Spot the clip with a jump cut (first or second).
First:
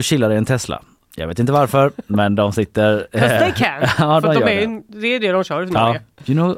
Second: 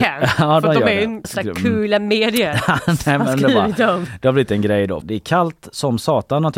second